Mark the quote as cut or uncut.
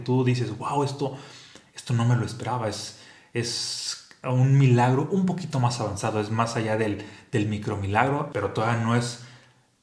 cut